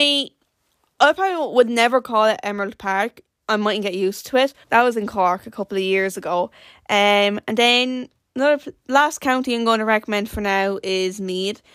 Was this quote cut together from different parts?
yes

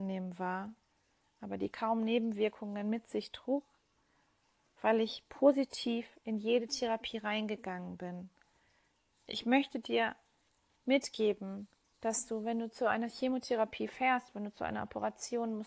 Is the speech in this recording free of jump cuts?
yes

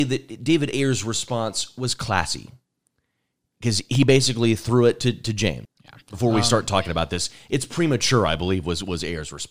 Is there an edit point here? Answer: yes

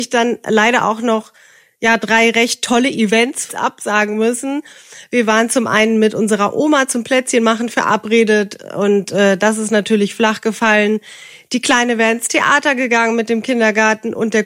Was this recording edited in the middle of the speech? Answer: yes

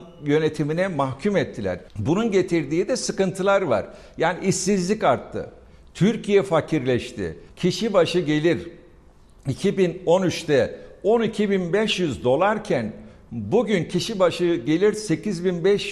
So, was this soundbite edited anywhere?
yes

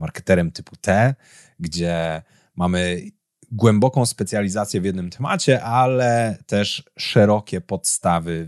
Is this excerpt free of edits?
yes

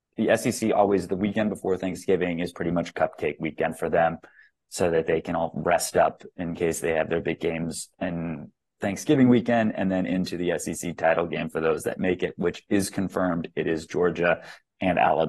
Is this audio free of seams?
yes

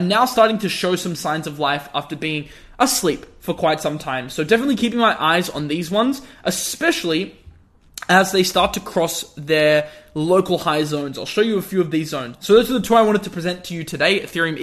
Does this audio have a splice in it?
yes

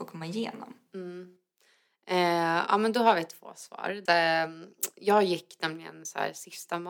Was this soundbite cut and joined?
yes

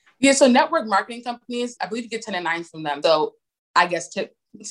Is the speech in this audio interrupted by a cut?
yes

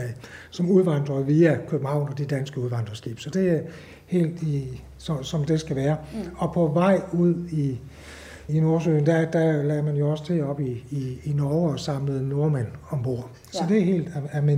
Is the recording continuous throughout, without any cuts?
no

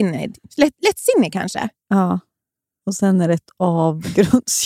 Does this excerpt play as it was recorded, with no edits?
yes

